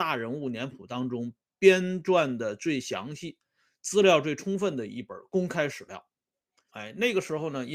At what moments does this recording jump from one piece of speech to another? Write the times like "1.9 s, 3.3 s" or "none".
6.7 s